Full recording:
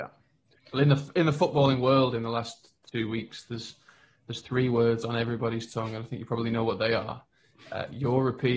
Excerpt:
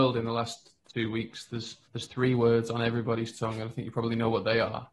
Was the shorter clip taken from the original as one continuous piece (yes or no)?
no